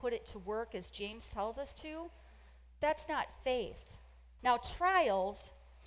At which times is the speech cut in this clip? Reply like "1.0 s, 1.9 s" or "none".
4.4 s